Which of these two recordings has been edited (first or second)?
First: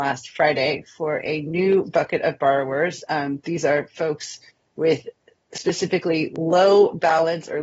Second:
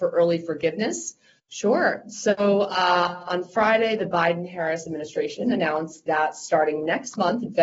second